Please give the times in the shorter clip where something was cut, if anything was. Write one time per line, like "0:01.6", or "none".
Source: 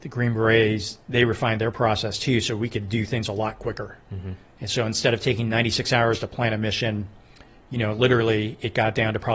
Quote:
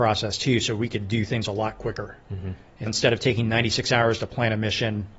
0:02.9